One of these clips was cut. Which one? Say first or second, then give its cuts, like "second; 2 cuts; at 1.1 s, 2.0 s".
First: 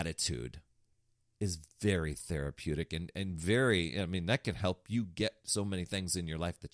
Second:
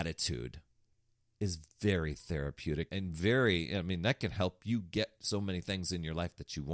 second; 1 cut; at 2.9 s